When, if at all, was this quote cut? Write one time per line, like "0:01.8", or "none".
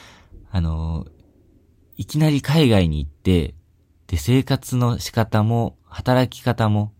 none